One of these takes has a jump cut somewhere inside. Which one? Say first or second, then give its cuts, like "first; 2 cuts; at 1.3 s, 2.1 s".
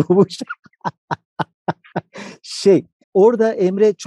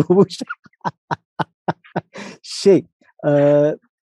first; 1 cut; at 3.0 s